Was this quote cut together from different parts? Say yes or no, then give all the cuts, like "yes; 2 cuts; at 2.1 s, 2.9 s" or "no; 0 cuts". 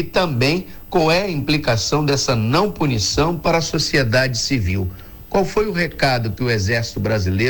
no; 0 cuts